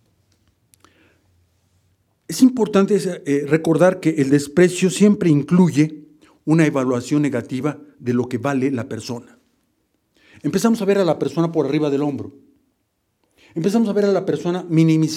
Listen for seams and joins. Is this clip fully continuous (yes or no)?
yes